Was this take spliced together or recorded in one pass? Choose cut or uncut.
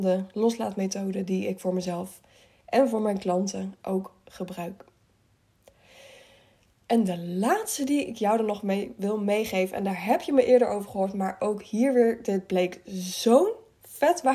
uncut